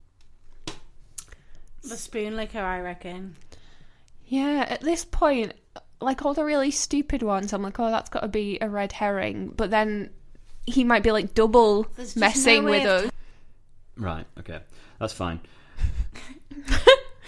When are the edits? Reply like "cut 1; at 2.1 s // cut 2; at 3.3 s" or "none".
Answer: cut 1; at 13.1 s